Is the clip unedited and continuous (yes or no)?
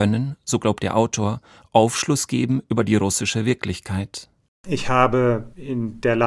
yes